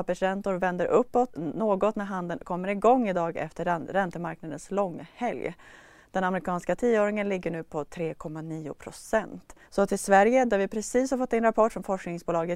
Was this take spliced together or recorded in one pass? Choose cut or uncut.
cut